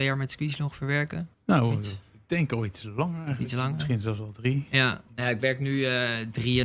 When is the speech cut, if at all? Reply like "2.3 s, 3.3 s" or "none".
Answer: none